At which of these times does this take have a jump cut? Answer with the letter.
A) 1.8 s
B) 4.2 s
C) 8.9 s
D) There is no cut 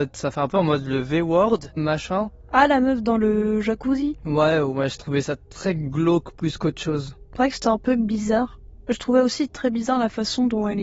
A